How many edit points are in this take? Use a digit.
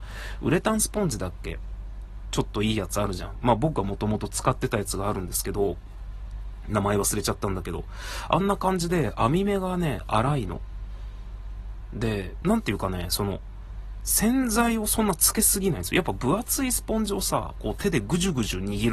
1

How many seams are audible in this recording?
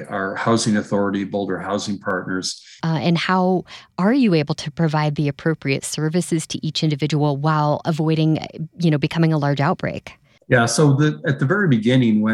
1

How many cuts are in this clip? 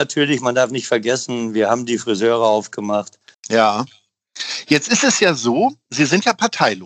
1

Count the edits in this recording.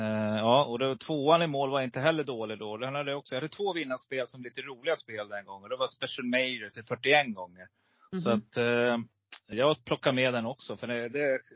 1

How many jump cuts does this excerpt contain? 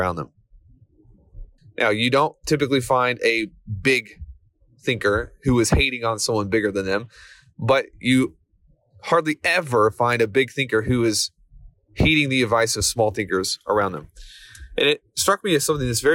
1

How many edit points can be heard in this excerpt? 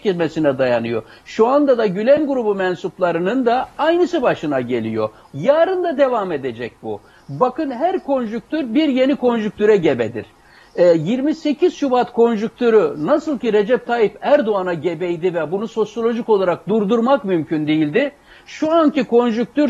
1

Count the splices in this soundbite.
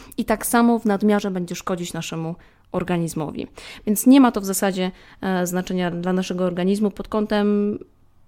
1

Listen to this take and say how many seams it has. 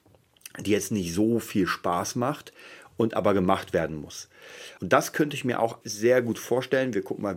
2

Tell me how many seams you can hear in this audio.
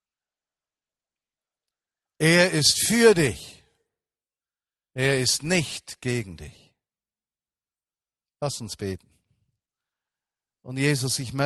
0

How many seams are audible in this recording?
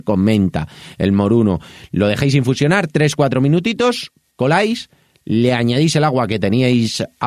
0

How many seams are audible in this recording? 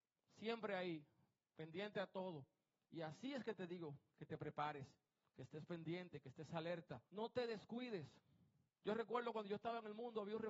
2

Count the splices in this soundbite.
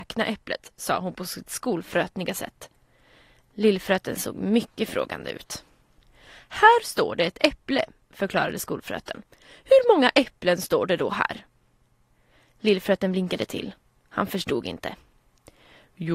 0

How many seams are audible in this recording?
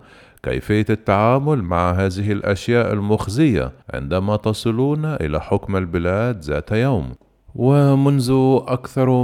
1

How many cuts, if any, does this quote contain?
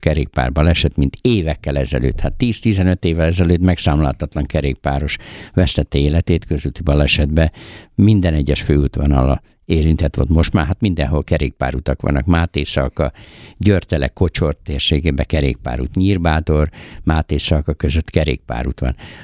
0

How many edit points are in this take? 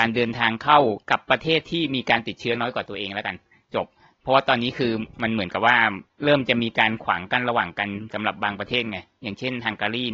1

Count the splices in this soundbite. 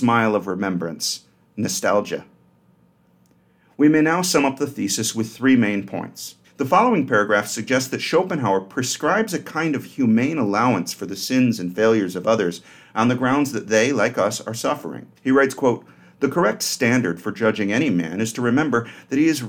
2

